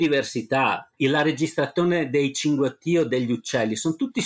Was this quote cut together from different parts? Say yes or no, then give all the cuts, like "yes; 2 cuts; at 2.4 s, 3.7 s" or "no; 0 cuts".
yes; 1 cut; at 0.9 s